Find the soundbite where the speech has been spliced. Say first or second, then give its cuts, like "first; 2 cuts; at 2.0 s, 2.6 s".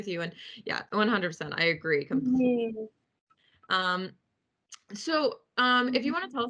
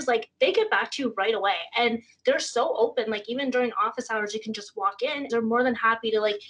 second; 1 cut; at 5.3 s